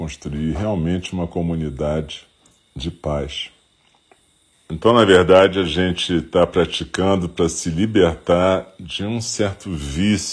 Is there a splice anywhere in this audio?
yes; 1 cut; at 4.5 s

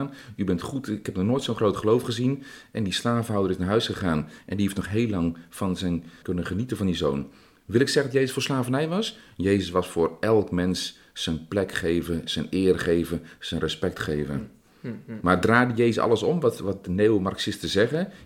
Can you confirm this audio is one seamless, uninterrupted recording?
no; 1 cut; at 6.2 s

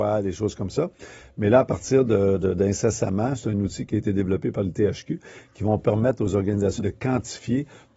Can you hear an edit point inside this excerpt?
yes; 1 cut; at 6.8 s

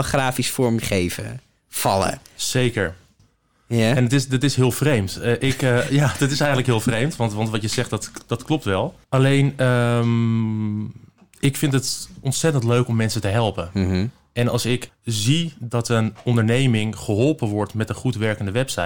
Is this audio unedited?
no; 3 cuts; at 3.2 s, 9.0 s, 14.9 s

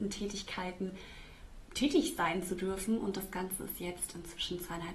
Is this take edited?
no; 0 cuts

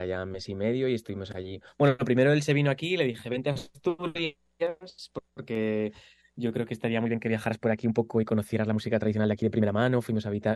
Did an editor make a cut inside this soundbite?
no; 0 cuts

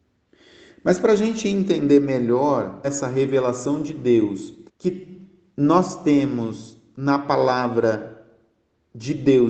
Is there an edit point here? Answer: yes; 2 cuts; at 2.8 s, 4.7 s

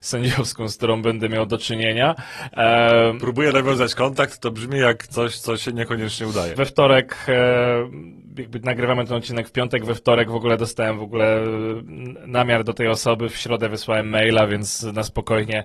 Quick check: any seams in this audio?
yes; 1 cut; at 6.6 s

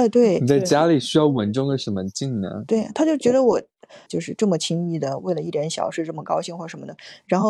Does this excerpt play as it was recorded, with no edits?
no; 1 cut; at 4.1 s

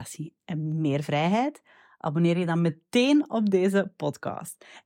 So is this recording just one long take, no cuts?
yes; 0 cuts

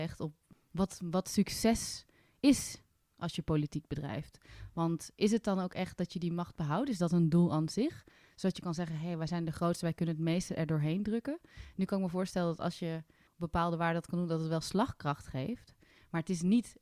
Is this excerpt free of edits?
yes; 0 cuts

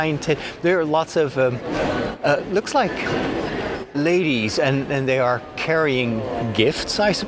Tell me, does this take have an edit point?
no; 0 cuts

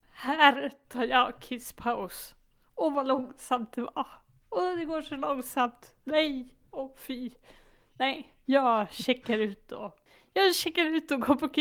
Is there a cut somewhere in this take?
no; 0 cuts

